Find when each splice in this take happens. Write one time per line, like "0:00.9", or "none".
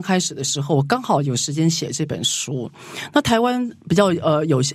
none